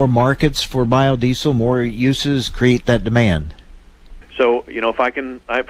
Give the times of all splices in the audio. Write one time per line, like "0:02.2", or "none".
0:04.2